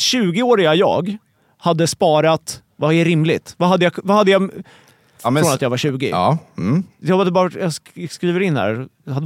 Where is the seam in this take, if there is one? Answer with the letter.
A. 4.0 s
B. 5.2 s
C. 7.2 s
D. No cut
B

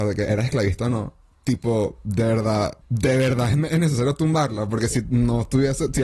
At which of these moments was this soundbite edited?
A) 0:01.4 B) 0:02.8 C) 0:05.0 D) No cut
B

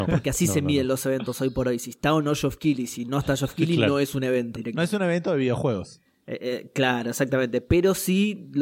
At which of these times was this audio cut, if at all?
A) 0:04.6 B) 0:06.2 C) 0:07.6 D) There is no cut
A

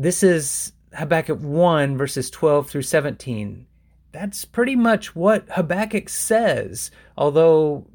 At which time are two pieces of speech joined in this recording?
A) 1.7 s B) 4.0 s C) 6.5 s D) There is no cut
B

